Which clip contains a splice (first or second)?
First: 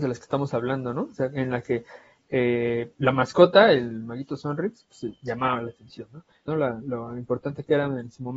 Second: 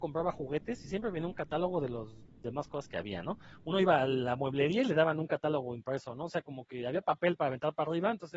first